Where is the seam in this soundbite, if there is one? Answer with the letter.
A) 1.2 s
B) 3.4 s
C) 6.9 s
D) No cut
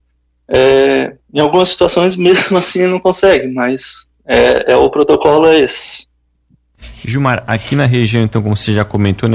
D